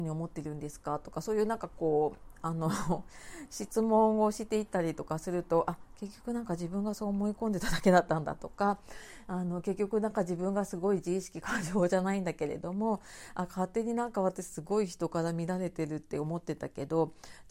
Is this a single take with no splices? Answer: yes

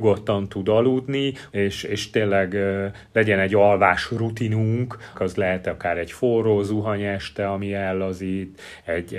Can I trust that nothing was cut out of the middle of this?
no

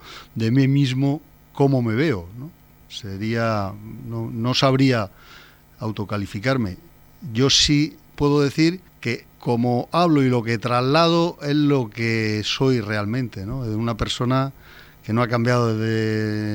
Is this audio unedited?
no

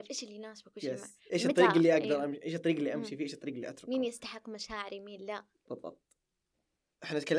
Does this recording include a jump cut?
no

